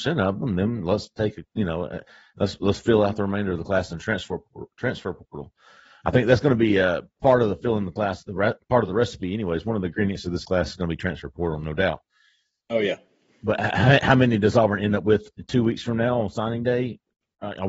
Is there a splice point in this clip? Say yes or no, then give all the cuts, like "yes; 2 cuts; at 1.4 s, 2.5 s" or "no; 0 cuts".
no; 0 cuts